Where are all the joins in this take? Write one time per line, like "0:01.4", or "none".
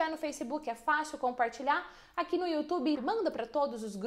0:02.9